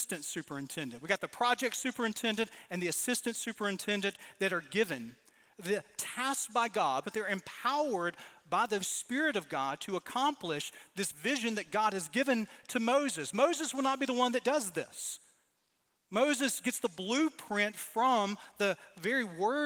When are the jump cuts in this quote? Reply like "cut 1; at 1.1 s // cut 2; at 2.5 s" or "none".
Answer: cut 1; at 7.0 s // cut 2; at 8.8 s